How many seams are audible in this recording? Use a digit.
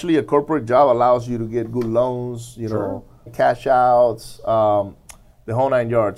1